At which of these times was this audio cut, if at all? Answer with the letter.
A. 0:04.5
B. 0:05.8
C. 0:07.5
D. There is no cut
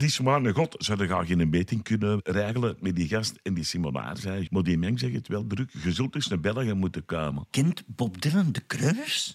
A